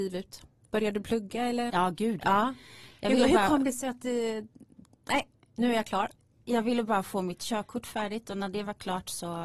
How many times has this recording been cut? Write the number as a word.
one